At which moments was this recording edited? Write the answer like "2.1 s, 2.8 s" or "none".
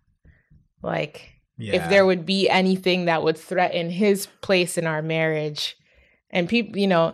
none